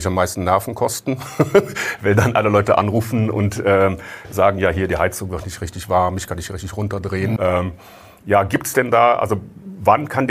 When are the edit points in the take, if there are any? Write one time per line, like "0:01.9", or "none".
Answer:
0:07.4